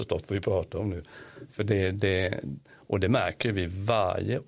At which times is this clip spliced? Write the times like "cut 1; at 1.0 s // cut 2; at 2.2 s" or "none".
none